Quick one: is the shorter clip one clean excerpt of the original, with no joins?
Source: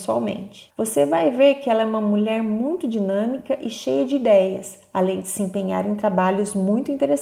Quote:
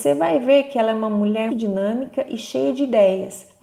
no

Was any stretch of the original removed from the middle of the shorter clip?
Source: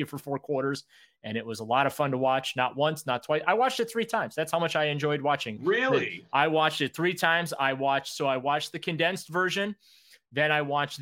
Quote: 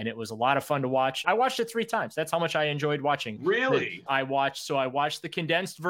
yes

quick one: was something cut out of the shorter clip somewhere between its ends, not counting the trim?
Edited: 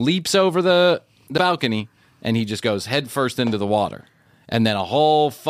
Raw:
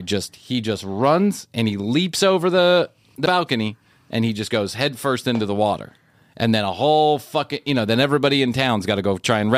no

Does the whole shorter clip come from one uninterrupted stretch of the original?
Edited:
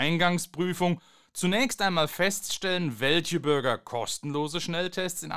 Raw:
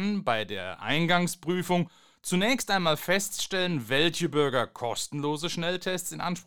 yes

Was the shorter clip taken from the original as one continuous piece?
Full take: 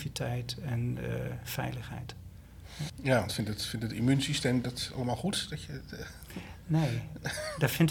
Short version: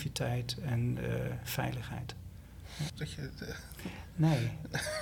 no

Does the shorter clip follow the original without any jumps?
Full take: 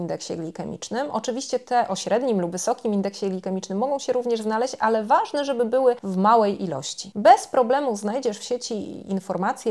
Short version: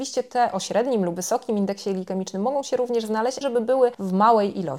no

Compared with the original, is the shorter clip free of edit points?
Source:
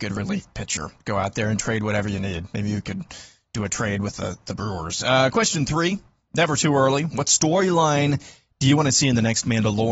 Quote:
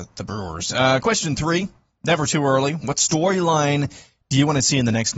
yes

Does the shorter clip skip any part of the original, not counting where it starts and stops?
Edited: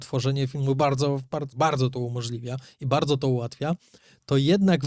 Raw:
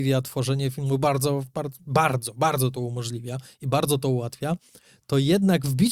yes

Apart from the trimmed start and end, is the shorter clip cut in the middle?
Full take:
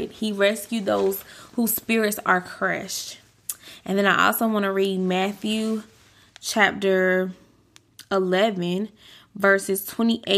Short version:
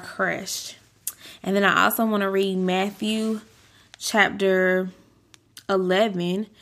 no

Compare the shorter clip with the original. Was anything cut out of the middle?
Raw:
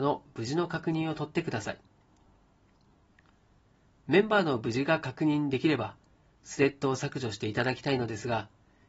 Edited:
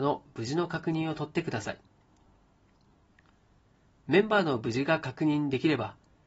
no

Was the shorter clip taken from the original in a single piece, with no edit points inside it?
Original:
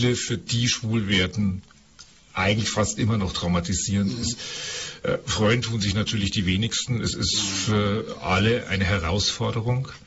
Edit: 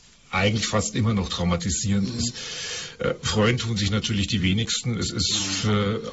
yes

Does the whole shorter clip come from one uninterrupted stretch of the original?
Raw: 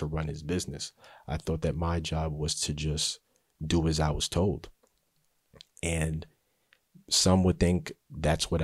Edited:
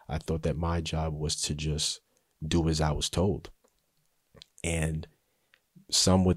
yes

